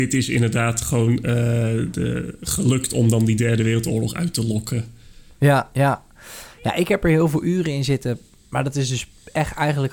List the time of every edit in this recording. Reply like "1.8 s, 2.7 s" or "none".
none